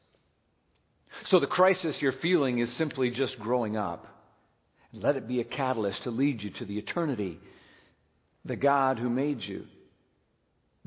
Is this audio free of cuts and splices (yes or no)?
yes